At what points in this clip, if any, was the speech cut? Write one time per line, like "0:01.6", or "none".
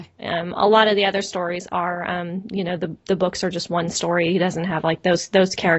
none

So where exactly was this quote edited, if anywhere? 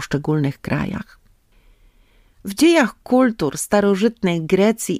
none

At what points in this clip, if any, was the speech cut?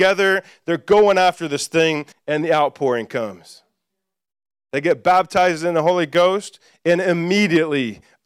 0:02.1

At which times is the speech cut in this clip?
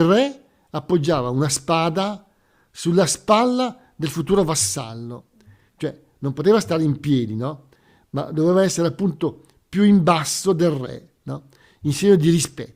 0:05.7

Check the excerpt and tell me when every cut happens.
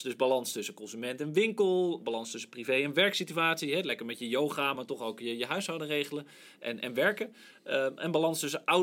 none

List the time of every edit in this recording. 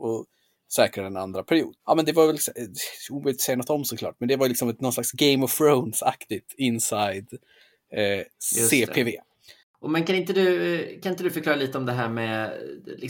0:09.6

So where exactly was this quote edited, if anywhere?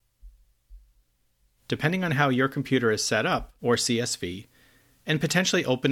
0:03.6

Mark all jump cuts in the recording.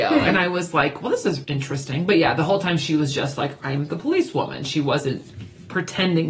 0:01.4

